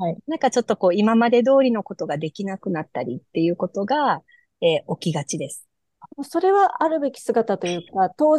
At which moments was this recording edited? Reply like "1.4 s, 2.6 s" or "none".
6.1 s